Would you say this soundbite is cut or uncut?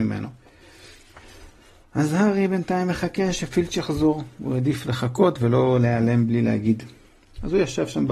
uncut